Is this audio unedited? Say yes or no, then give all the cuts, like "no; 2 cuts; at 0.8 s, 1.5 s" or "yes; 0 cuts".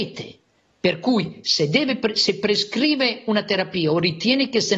yes; 0 cuts